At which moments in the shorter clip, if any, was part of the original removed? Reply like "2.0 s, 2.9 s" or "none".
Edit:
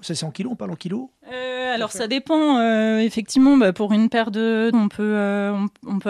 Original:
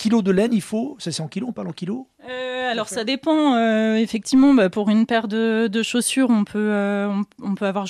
4.7 s